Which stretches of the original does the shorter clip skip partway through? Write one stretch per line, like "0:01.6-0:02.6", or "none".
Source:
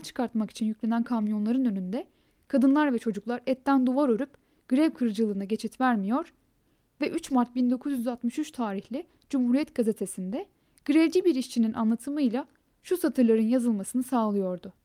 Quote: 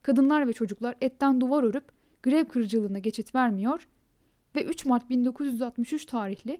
none